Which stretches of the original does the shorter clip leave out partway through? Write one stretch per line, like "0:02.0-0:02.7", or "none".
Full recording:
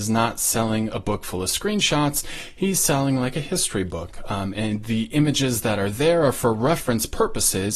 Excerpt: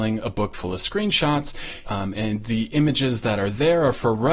0:02.5-0:04.2